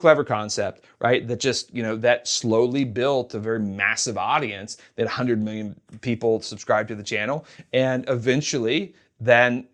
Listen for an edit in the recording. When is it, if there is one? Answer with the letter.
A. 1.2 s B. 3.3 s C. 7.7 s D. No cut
D